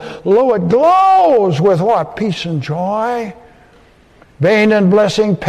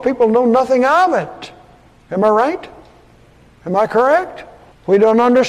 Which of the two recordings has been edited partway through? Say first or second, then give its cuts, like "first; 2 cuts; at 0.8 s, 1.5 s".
first; 1 cut; at 4.3 s